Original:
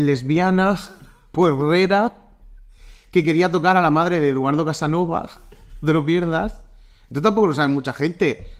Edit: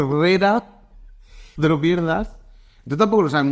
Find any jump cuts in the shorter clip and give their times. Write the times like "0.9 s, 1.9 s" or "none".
1.6 s